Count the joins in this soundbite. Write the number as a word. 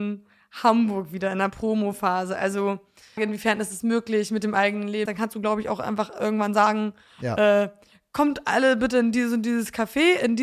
two